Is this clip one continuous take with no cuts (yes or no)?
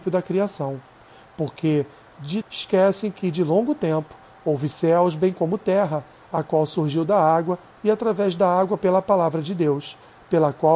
no